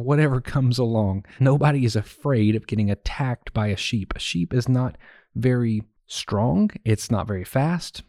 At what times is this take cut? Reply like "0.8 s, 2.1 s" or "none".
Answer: 1.4 s